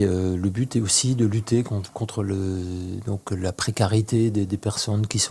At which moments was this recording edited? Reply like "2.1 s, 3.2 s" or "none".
none

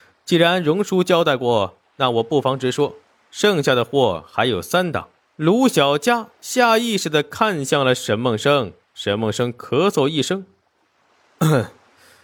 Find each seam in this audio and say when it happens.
5.2 s

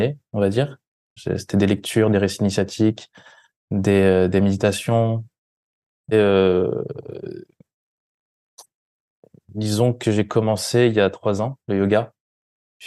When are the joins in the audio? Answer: 1.2 s, 6.1 s

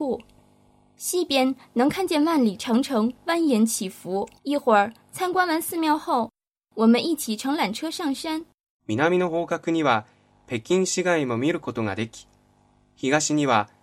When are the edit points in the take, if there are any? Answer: 4.4 s, 8.8 s

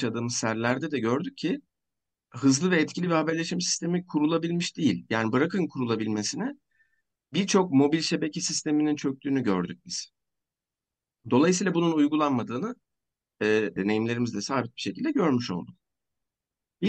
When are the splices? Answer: 13.8 s

